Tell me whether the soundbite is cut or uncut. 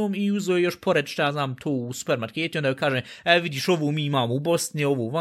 uncut